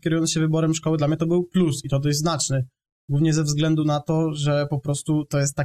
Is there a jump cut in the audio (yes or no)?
no